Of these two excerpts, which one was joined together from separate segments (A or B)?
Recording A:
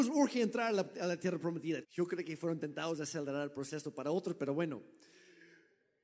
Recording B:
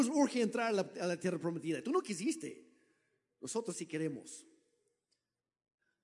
A